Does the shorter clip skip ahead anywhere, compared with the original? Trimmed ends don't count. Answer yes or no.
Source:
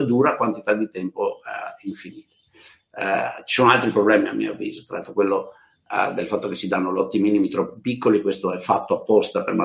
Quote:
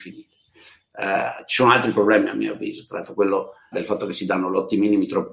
yes